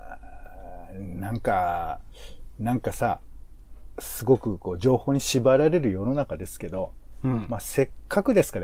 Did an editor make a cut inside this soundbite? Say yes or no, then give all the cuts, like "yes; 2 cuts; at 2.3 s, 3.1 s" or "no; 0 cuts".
yes; 1 cut; at 3.9 s